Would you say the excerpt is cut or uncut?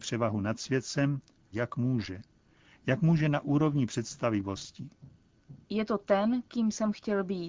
cut